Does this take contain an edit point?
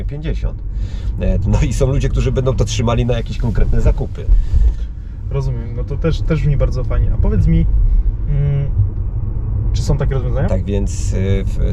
yes; 2 cuts; at 1.4 s, 10.5 s

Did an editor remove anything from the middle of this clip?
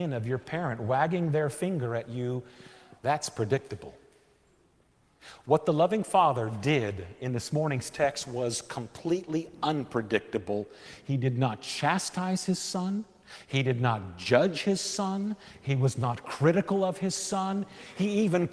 yes; 1 cut; at 3.0 s

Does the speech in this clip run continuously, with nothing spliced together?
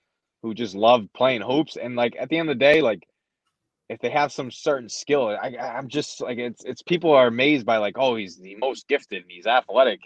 yes; 0 cuts

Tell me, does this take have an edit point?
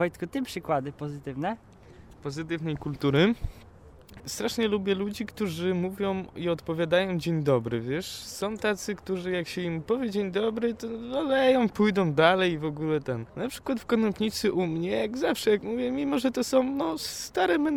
yes; 2 cuts; at 4.2 s, 13.3 s

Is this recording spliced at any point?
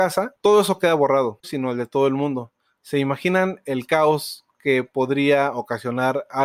yes; 1 cut; at 1.4 s

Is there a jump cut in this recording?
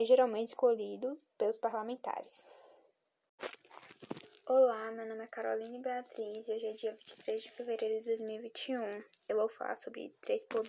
no; 0 cuts

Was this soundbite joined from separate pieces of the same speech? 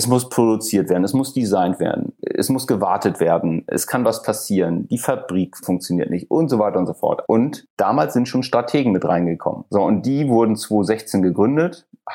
yes; 2 cuts; at 7.2 s, 9.7 s

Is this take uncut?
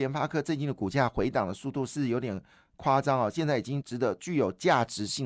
no; 1 cut; at 3.8 s

